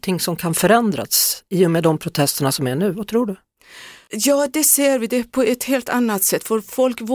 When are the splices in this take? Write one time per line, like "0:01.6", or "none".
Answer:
none